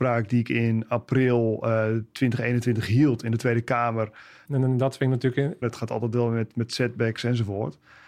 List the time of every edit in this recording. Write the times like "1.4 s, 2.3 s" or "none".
4.4 s, 5.6 s